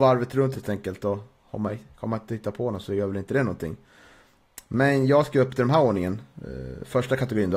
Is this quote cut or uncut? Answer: uncut